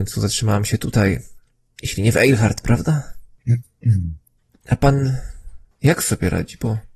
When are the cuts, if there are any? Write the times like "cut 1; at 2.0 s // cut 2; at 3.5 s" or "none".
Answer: cut 1; at 1.7 s